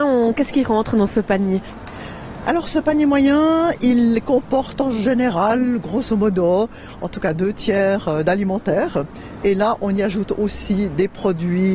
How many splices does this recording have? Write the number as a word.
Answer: zero